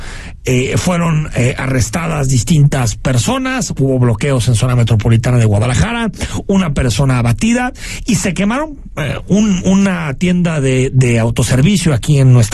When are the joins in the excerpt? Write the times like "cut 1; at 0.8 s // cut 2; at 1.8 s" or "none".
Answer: none